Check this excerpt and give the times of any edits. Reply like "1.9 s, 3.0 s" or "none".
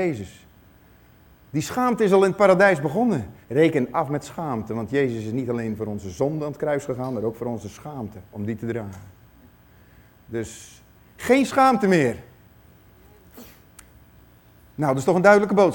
3.4 s, 8.3 s